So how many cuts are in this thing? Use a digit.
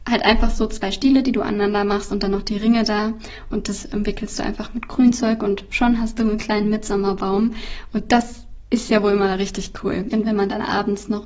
1